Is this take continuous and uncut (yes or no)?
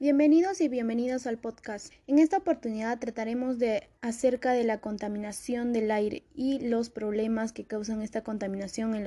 no